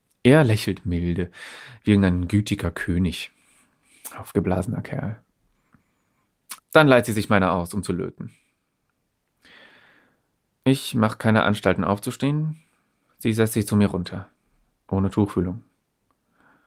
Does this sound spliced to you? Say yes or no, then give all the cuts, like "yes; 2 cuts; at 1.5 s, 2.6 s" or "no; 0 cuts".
yes; 1 cut; at 6.6 s